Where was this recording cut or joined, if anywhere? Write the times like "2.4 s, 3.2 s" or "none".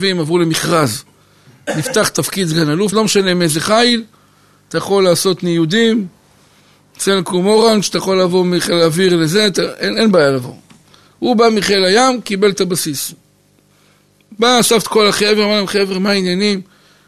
2.9 s